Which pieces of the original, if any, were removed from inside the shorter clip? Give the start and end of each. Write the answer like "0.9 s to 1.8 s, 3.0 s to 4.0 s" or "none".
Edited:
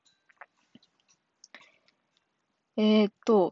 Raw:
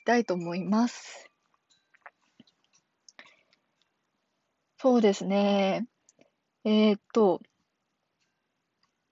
4.2 s to 6.5 s